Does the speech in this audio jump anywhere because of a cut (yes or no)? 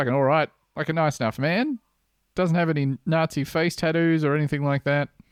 no